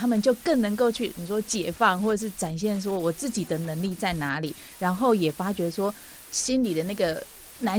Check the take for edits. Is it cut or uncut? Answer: uncut